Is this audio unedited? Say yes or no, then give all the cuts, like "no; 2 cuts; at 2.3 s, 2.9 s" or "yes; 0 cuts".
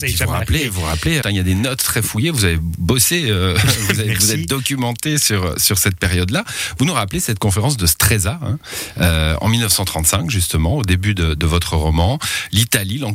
no; 1 cut; at 1.2 s